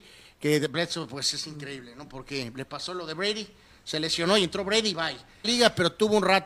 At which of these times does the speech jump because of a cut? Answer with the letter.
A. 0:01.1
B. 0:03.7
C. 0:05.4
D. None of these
C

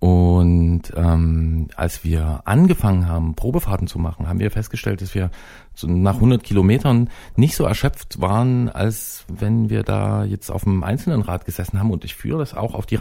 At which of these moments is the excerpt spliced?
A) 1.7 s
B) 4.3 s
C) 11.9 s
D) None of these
D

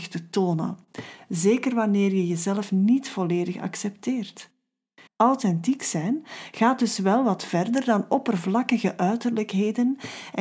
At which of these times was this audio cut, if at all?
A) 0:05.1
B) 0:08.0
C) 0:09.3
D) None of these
A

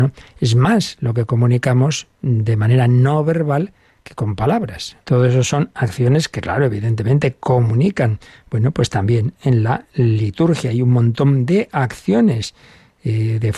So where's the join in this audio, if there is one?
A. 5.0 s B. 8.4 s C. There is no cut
A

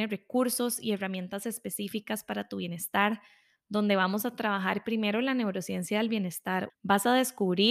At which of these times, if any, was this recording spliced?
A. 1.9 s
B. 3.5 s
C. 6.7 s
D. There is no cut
C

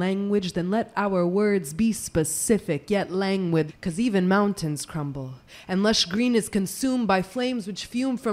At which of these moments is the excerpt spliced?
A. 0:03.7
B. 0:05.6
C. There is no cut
A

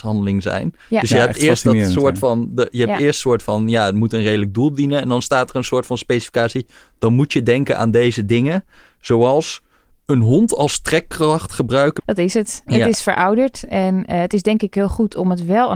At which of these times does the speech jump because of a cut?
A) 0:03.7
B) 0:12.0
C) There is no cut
B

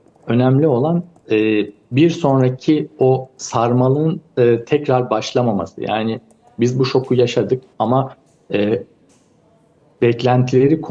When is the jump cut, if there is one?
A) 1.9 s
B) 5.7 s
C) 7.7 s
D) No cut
C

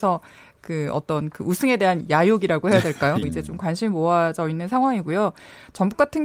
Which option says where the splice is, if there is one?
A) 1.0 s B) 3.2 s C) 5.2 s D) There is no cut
B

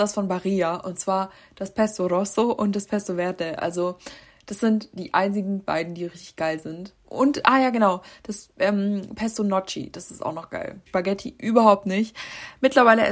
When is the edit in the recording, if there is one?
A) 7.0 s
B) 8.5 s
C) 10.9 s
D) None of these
C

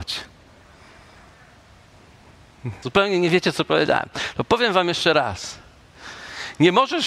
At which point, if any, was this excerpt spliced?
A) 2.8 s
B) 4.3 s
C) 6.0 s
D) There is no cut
A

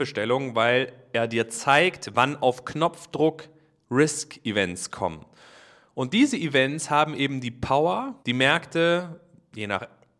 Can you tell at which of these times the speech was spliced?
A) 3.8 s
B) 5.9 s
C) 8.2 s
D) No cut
C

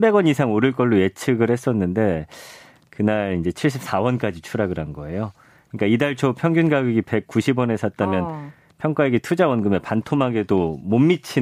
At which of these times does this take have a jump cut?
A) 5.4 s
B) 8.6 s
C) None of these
C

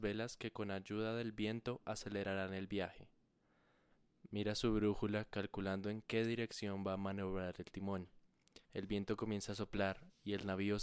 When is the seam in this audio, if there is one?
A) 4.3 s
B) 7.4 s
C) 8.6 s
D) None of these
C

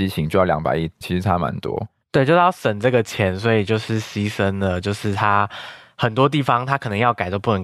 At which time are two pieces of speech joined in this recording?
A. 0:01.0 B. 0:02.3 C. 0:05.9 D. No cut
A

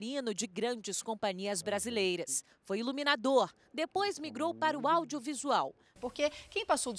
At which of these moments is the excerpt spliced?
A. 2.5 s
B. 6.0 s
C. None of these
B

